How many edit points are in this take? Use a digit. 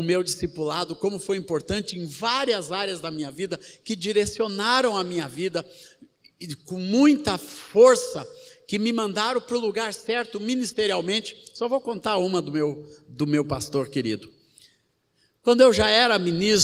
0